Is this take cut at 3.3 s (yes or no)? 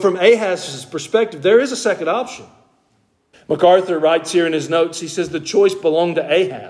yes